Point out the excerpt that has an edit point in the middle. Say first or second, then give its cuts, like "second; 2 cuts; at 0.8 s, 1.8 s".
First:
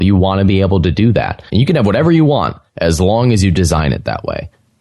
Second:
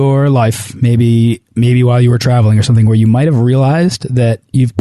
first; 1 cut; at 1.5 s